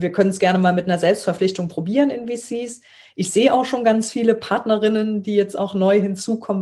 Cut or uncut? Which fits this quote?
uncut